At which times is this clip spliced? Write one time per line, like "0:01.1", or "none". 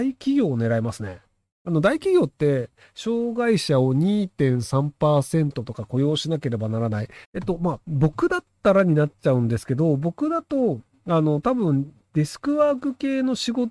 0:07.2